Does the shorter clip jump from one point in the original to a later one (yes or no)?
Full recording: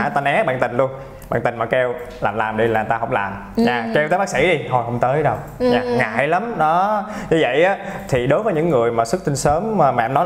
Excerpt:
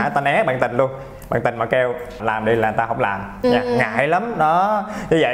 yes